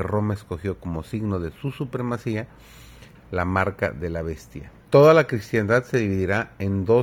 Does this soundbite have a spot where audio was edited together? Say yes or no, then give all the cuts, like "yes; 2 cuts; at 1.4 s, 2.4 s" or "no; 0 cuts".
yes; 2 cuts; at 3.1 s, 4.8 s